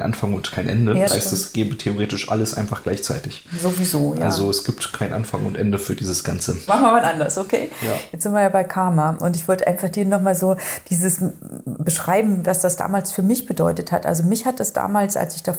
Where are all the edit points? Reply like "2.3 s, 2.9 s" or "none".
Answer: 1.1 s, 6.7 s